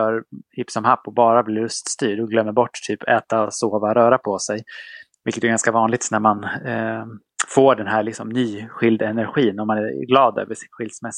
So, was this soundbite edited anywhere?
no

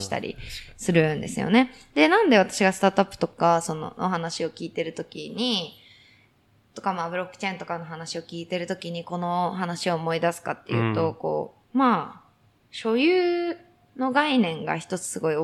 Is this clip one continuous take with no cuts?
no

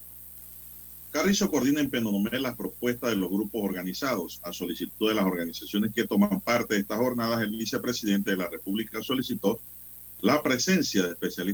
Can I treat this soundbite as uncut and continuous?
yes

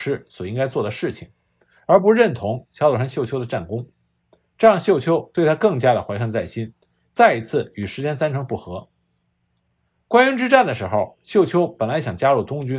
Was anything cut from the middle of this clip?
no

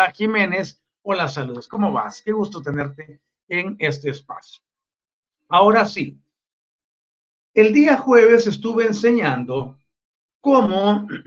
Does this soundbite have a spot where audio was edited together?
yes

